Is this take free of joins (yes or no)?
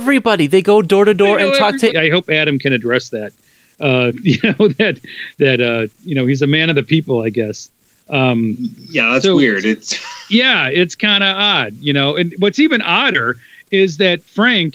no